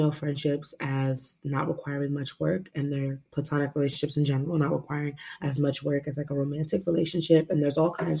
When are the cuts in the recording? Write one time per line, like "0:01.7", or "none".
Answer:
none